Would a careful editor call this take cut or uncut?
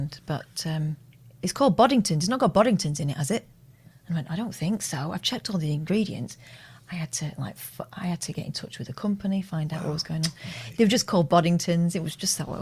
cut